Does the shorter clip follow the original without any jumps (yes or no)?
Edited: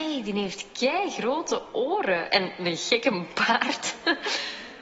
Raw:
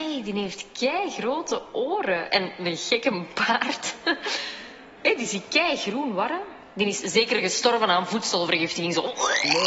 yes